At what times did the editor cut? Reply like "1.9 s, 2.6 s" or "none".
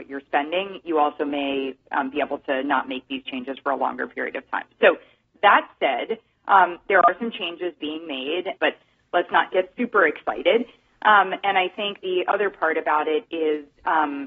8.6 s

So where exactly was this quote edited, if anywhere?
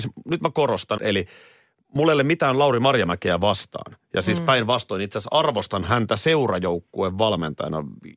1.0 s

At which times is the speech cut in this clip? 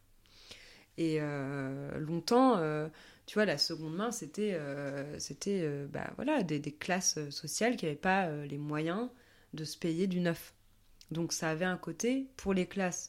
none

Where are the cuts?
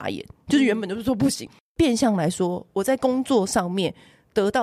1.5 s

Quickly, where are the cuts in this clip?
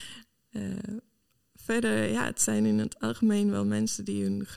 none

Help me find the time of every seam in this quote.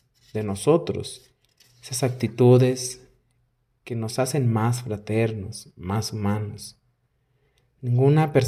none

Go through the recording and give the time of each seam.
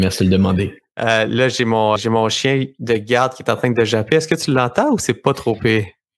2.0 s

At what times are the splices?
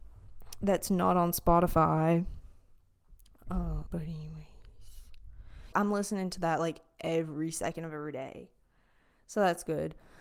3.9 s, 5.7 s

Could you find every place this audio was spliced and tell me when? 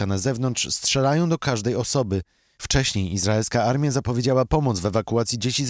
none

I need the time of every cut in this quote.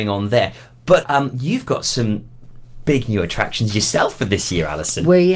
1.0 s

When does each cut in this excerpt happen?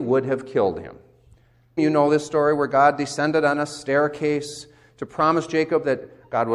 1.8 s

